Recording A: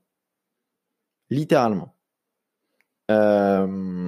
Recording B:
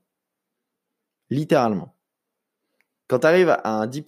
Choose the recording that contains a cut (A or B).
A